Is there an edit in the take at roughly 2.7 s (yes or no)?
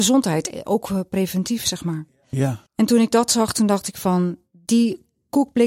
yes